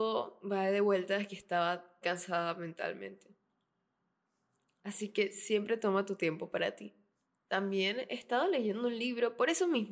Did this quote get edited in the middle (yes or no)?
yes